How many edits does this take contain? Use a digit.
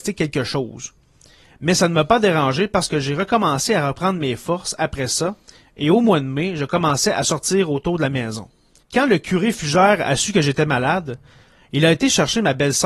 1